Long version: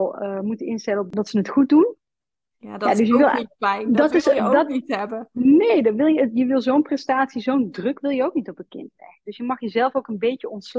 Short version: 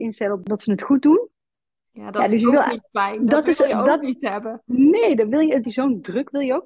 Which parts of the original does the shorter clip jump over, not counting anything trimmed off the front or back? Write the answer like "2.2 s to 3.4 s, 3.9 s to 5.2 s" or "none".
6.3 s to 7.3 s